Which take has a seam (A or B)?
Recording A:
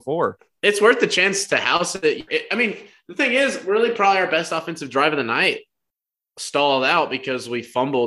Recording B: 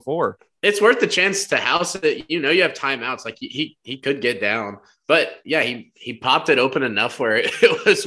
A